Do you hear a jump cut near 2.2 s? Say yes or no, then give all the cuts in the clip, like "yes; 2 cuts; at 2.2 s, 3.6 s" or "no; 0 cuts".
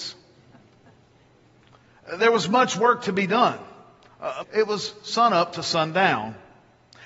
no; 1 cut; at 4.4 s